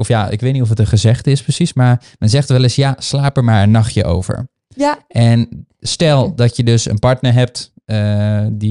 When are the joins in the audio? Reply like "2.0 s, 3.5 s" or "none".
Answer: none